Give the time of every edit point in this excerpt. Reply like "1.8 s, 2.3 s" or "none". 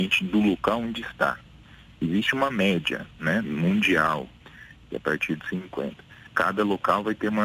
6.3 s